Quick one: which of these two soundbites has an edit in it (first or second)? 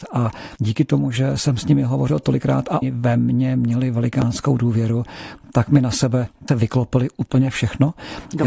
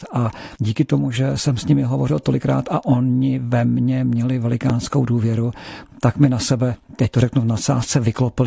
first